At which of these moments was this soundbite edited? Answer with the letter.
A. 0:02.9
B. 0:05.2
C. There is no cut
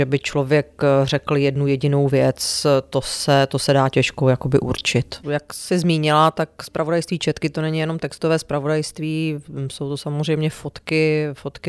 B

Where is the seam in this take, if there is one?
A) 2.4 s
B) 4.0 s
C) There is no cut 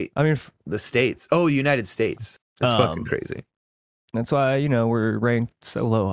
A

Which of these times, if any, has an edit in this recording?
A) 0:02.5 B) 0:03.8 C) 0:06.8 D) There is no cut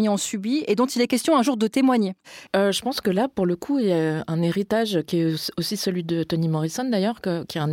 A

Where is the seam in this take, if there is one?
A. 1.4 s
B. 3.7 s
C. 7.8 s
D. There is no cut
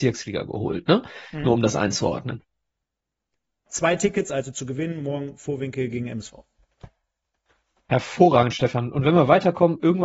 B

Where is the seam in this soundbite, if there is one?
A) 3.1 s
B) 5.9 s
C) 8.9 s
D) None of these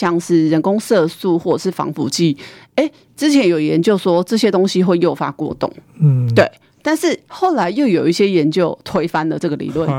D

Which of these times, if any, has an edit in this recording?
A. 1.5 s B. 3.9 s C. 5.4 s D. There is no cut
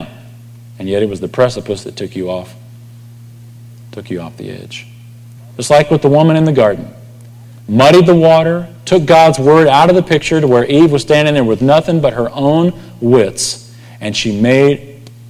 C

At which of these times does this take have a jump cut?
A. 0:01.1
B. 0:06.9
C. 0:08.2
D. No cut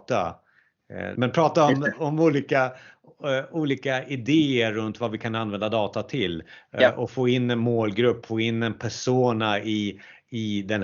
A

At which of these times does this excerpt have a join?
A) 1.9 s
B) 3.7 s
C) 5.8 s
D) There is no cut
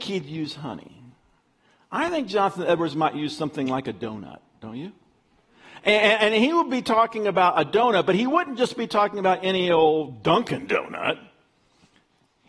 D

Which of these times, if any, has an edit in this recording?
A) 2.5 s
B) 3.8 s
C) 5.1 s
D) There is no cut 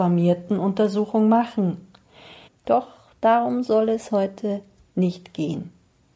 A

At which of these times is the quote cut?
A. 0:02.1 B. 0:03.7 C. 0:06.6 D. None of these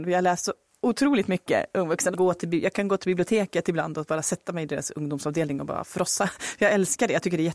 A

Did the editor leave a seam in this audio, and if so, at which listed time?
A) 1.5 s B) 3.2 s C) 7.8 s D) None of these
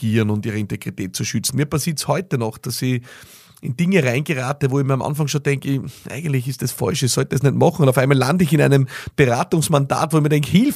A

